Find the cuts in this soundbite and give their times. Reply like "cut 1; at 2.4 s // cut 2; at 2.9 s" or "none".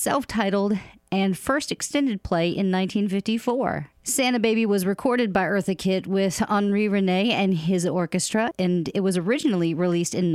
cut 1; at 3.9 s